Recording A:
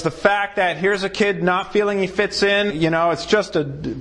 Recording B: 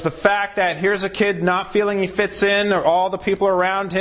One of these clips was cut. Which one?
A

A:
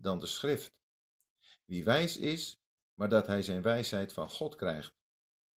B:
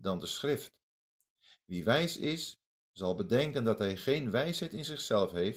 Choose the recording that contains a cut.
A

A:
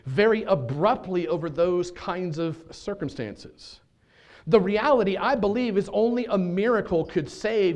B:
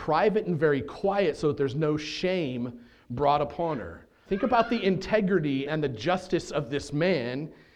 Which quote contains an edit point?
B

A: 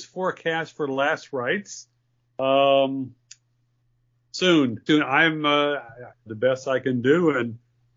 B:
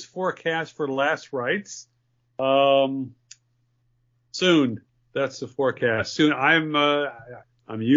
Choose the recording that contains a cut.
A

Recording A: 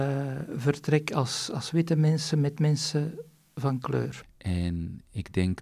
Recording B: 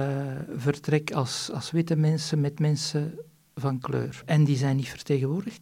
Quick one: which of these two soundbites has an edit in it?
A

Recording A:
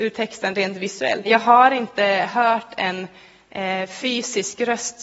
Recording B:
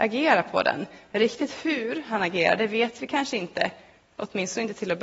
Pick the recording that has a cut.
A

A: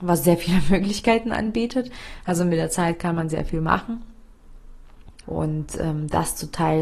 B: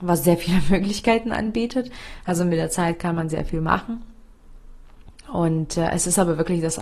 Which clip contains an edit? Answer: A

